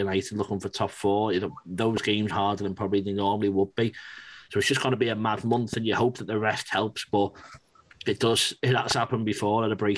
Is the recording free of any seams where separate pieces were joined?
no; 1 cut; at 2.3 s

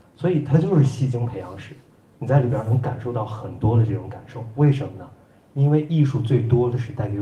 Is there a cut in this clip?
no; 0 cuts

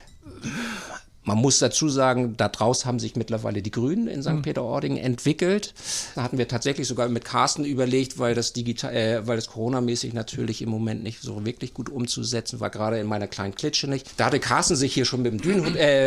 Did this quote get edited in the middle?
yes; 2 cuts; at 6.1 s, 14.1 s

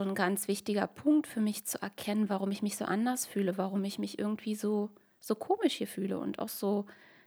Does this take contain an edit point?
no; 0 cuts

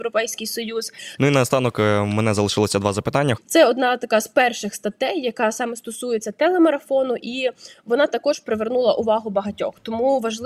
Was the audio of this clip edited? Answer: yes; 2 cuts; at 1.2 s, 3.4 s

